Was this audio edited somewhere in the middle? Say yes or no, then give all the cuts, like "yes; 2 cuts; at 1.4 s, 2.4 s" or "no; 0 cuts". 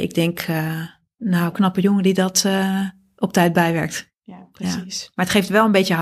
no; 0 cuts